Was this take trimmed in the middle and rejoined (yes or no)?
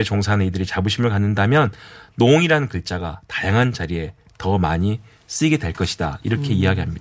no